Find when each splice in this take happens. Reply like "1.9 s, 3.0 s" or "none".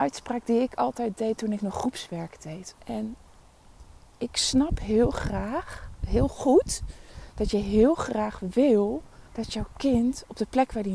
2.8 s, 9.3 s